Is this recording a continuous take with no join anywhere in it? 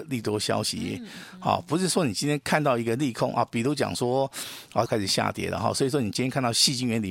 no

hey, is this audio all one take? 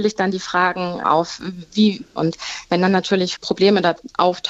no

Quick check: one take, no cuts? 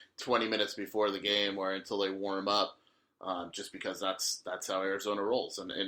yes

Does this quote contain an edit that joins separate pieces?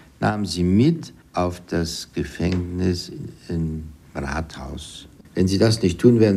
yes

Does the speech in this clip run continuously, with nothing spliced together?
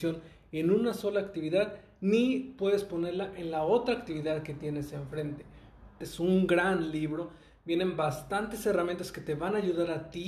no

